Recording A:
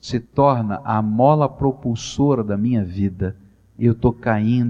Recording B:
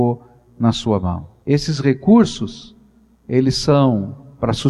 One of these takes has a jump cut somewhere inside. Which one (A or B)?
B